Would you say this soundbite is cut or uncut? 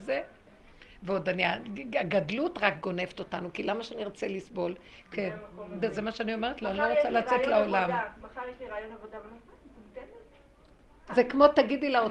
cut